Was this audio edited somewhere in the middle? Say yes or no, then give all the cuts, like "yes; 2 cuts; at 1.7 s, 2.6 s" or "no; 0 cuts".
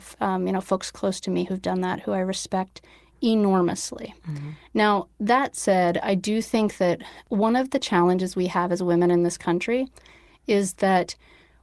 no; 0 cuts